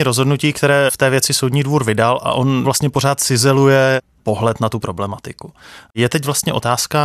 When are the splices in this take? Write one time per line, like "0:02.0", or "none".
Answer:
none